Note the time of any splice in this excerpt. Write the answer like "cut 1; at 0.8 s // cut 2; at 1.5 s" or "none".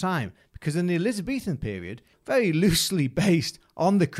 cut 1; at 2.1 s